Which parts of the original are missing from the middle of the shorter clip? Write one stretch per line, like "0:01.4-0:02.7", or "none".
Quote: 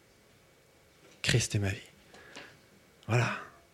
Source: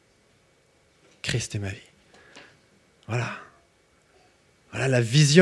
none